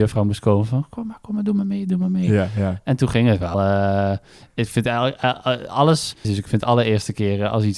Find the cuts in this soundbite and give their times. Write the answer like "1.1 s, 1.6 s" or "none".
3.5 s, 6.2 s